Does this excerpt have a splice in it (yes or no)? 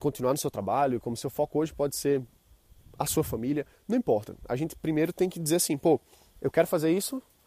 no